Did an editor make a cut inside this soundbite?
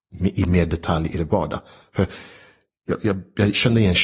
no; 0 cuts

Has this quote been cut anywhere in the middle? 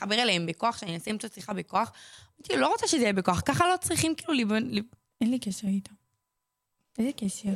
yes; 1 cut; at 5.0 s

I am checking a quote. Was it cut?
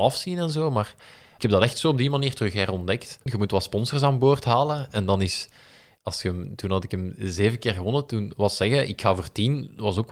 yes; 1 cut; at 3.3 s

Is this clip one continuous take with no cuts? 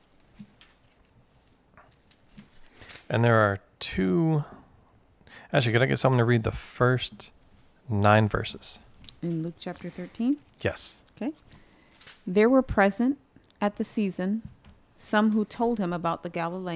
yes; 0 cuts

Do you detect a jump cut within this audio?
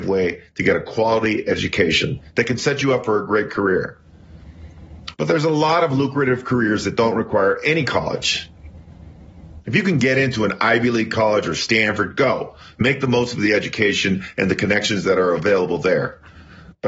yes; 1 cut; at 5.1 s

